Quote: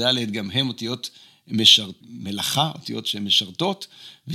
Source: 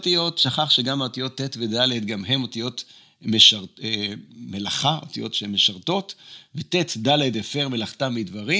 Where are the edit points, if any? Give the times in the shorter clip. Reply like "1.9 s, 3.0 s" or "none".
2.0 s